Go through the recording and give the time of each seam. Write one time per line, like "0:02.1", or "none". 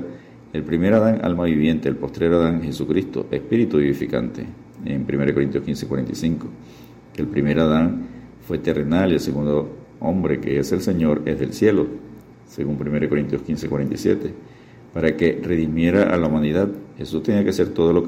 none